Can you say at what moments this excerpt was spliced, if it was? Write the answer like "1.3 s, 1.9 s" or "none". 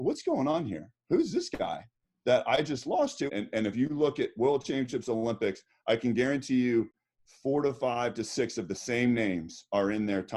3.3 s